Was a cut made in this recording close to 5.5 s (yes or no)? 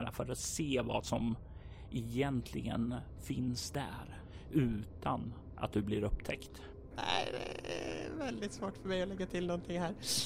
no